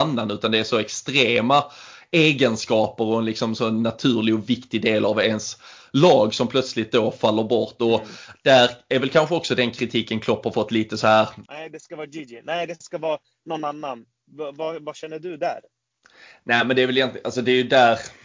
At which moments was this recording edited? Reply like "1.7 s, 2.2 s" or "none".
11.5 s